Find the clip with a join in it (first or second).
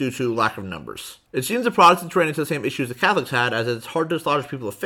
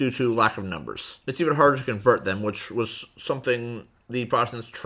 second